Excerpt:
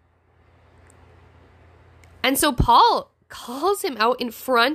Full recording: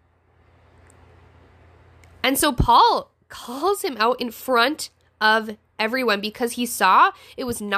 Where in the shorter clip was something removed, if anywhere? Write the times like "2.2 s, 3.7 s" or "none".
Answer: none